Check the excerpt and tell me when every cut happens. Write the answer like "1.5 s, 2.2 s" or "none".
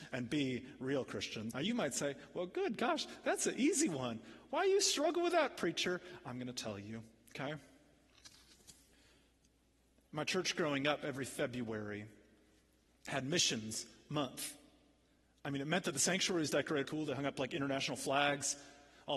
1.5 s, 16.8 s